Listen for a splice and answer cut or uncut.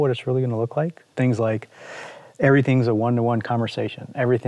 cut